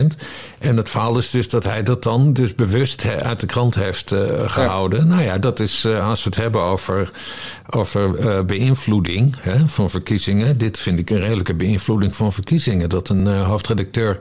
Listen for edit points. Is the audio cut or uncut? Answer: uncut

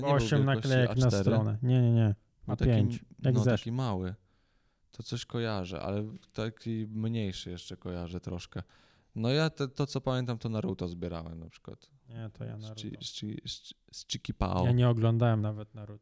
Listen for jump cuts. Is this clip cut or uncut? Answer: uncut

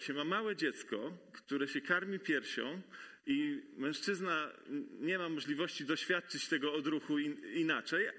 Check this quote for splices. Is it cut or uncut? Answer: uncut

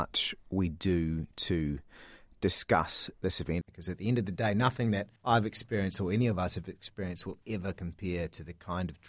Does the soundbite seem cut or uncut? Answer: cut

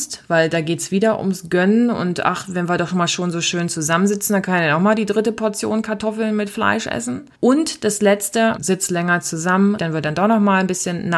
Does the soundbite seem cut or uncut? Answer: cut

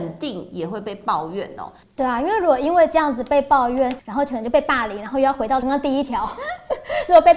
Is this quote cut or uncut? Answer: cut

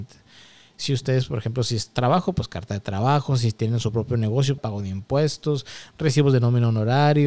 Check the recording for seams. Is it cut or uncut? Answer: cut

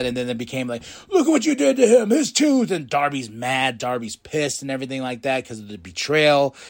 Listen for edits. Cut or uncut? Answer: uncut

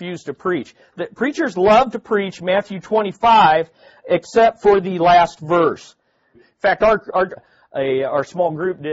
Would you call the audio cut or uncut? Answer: cut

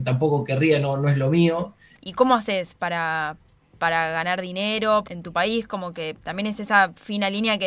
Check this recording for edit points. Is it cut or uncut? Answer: cut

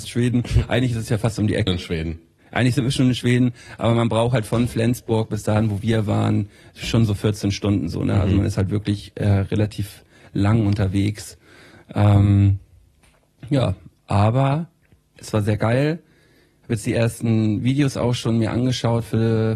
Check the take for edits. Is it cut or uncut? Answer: cut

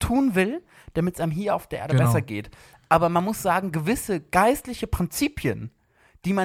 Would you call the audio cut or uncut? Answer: uncut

